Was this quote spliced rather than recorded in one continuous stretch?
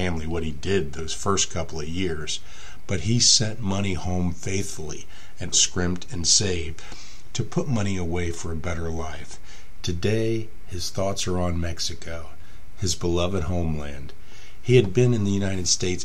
yes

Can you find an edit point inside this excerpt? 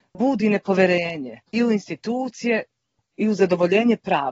yes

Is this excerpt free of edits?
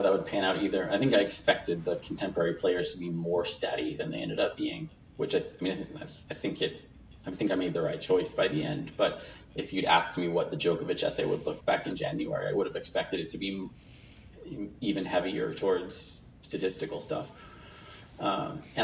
no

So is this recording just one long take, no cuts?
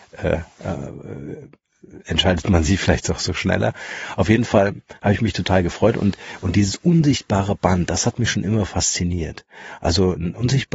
yes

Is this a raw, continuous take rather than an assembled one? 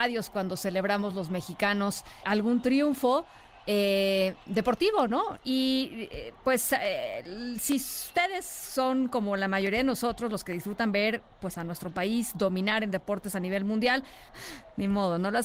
no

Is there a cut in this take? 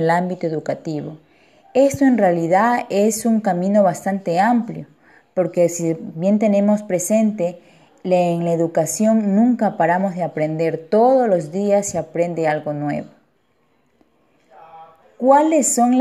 yes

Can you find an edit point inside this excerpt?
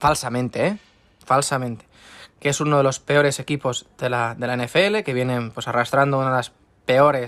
no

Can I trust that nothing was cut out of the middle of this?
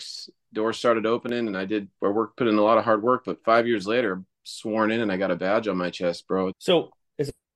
no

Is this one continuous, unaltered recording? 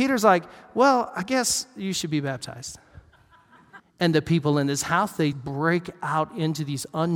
no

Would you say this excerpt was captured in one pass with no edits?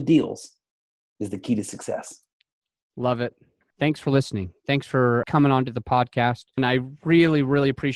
no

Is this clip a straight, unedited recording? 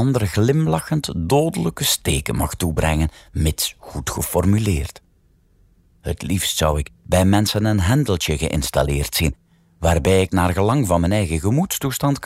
yes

